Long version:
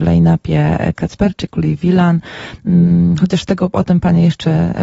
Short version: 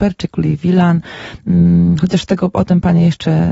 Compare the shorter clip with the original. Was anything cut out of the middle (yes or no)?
no